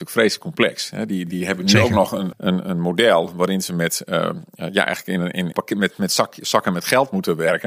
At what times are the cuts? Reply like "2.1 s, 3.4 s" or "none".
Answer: 2.3 s, 5.5 s